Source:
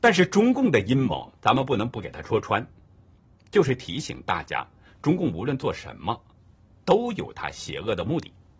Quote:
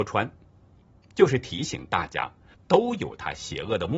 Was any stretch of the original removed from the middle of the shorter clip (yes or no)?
yes